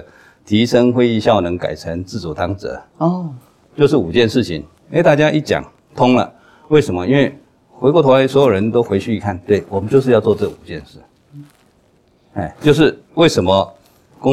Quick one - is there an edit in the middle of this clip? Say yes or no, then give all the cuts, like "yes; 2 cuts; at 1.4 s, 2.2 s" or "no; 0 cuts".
no; 0 cuts